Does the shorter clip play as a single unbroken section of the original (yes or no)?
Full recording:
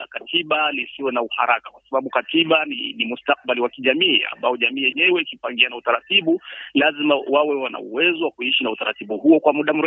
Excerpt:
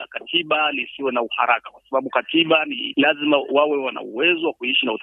no